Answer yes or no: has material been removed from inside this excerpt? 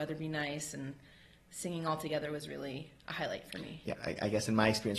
yes